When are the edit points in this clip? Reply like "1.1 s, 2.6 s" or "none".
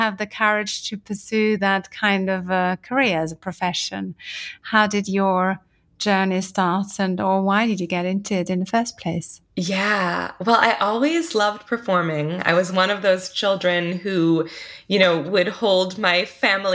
9.5 s